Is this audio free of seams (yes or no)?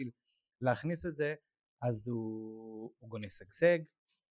yes